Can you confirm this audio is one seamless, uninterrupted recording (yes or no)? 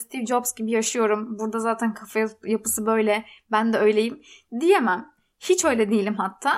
yes